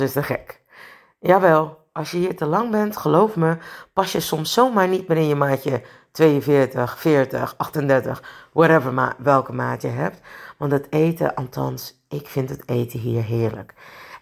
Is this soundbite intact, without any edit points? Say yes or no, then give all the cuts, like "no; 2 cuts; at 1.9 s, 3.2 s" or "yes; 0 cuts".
yes; 0 cuts